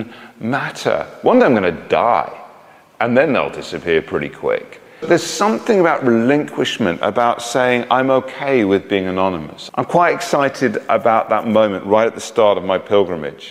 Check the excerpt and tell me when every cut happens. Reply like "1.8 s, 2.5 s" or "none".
5.0 s, 9.7 s